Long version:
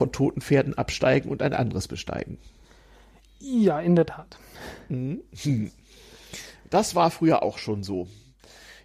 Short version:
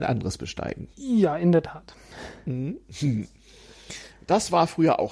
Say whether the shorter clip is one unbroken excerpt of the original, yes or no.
no